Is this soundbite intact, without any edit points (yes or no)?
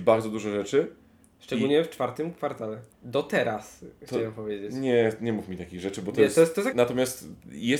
no